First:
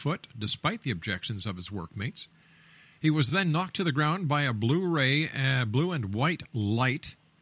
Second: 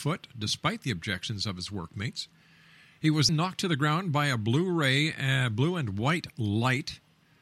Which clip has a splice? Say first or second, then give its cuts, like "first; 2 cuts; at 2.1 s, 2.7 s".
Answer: second; 1 cut; at 3.3 s